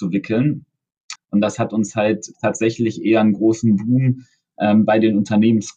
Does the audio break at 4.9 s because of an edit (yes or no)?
no